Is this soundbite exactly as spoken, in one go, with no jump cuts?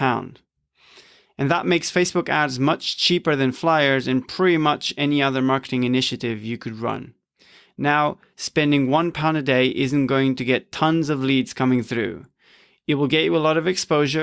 no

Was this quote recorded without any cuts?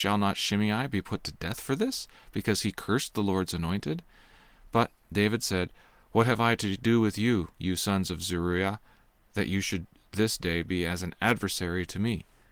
yes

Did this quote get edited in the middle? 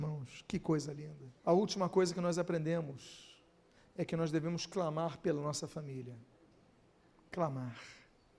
yes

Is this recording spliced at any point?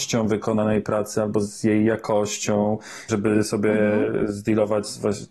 yes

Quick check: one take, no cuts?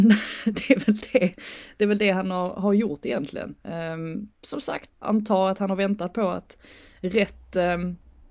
no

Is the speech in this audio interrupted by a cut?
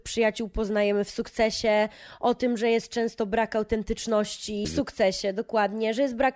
yes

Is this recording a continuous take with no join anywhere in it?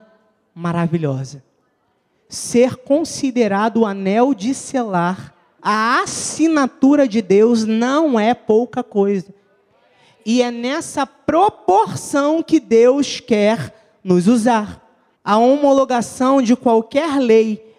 no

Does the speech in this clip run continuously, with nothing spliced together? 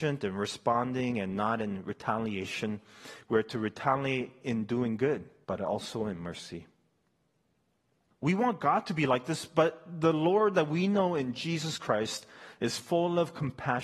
no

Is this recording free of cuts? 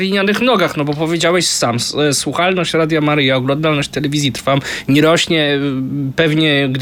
yes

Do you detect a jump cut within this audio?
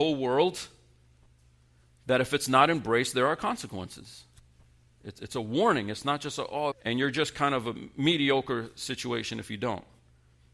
yes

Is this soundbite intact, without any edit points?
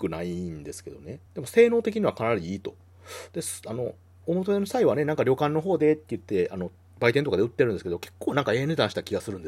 yes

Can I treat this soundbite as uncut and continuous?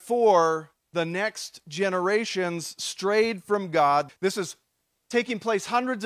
no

